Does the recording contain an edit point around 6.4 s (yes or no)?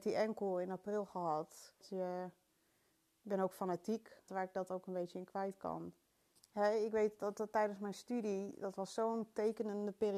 yes